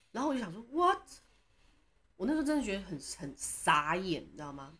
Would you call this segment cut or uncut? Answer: uncut